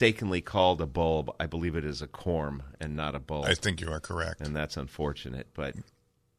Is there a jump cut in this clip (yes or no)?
no